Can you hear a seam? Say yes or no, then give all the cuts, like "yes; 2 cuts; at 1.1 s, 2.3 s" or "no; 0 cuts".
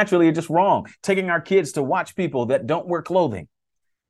no; 0 cuts